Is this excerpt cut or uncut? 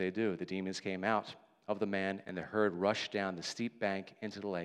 cut